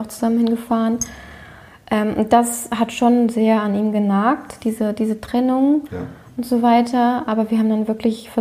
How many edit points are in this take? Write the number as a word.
zero